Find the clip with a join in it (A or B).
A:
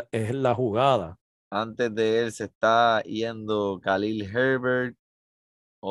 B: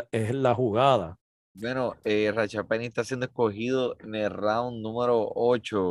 A